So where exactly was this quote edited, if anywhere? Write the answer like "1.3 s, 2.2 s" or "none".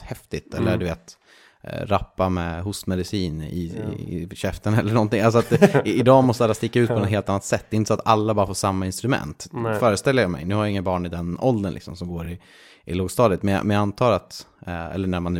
none